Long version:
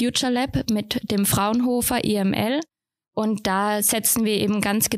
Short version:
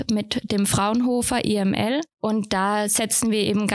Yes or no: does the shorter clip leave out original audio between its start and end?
yes